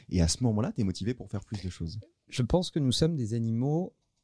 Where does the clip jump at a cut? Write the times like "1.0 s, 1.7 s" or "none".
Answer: 2.2 s